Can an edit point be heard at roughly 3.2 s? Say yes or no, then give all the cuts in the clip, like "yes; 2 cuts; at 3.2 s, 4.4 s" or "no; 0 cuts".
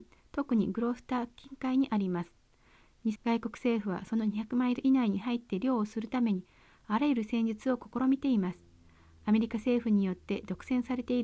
yes; 1 cut; at 3.2 s